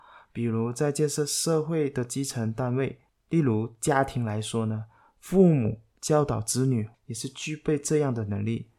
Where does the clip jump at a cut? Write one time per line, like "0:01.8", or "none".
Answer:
0:06.9